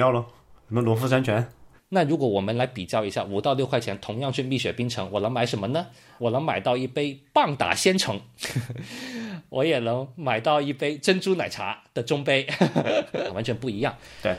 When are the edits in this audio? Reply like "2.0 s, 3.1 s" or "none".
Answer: 1.8 s, 6.2 s, 13.3 s